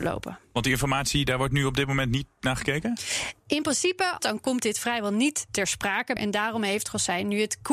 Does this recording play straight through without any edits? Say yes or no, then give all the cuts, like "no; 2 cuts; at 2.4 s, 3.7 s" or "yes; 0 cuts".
no; 2 cuts; at 4.2 s, 6.2 s